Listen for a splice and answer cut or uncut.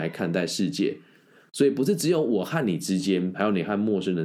cut